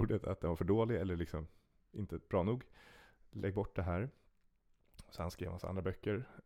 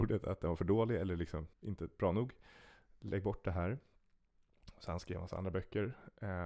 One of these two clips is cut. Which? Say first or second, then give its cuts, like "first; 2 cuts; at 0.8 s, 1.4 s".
second; 1 cut; at 1.5 s